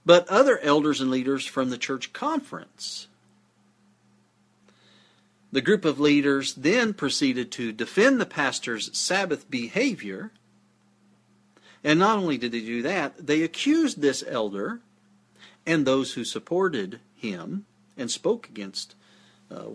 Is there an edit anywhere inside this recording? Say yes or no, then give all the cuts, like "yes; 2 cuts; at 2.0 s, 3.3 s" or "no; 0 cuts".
no; 0 cuts